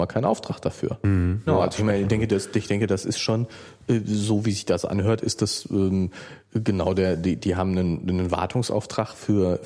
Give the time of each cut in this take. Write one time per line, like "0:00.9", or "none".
0:01.5